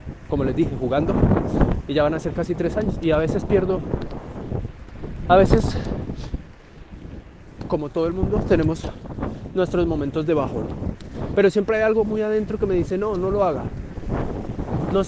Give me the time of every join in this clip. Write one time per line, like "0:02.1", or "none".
0:01.9
0:11.3